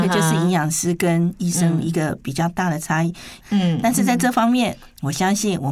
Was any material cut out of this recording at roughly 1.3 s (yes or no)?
no